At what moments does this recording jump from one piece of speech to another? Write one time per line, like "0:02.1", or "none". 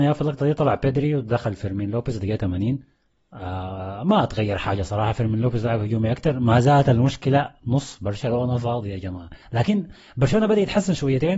0:09.4